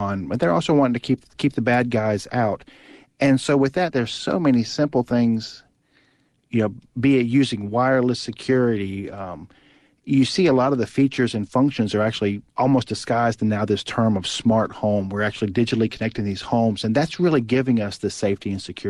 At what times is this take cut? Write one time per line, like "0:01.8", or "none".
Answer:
0:12.5